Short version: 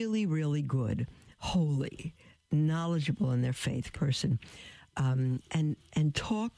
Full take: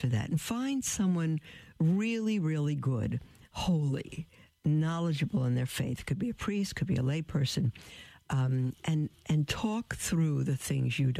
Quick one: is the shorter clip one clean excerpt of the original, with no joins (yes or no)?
no